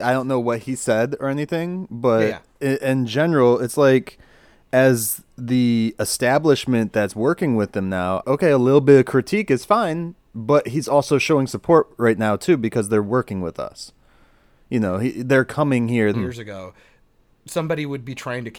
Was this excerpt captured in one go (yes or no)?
no